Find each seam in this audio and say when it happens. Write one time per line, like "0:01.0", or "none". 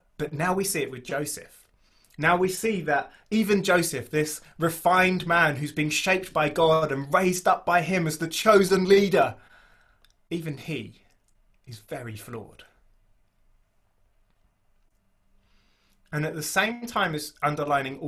none